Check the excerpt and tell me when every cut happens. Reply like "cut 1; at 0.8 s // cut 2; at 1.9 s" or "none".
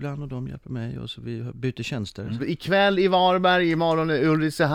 cut 1; at 2.4 s